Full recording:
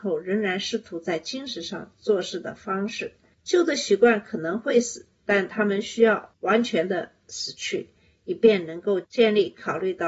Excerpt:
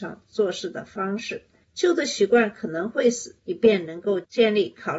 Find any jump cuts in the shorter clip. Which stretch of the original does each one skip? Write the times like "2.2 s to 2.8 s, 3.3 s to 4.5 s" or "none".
5.1 s to 8.2 s